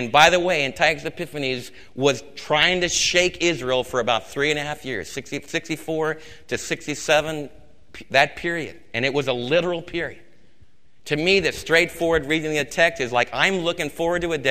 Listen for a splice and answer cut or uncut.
cut